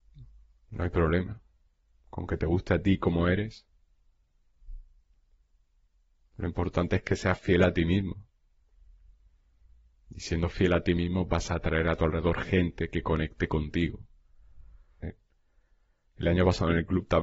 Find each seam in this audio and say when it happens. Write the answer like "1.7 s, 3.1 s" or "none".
15.0 s